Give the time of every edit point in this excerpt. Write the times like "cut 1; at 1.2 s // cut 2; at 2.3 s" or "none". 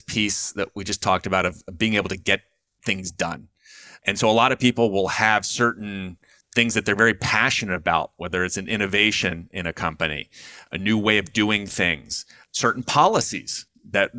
none